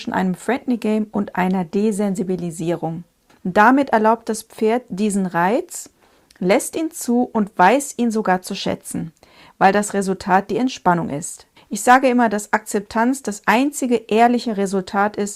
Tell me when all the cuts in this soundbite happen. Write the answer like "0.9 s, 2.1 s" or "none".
3.3 s, 11.6 s